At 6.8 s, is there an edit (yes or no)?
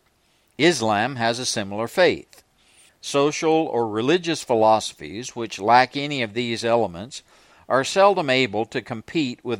no